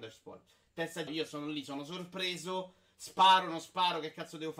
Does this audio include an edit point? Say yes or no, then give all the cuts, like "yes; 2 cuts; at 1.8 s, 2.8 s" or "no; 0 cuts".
yes; 1 cut; at 1.1 s